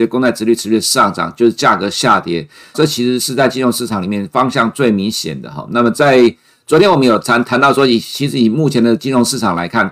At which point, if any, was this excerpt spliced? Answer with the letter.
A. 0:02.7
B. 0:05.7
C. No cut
A